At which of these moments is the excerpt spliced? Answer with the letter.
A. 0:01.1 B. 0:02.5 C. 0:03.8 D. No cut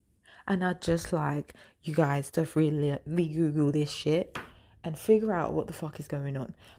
D